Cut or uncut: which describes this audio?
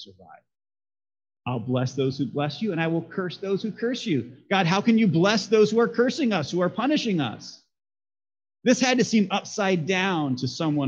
cut